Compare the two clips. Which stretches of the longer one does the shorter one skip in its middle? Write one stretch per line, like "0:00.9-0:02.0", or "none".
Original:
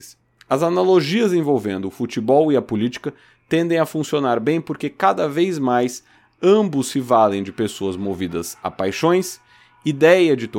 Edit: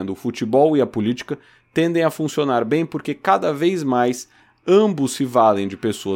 none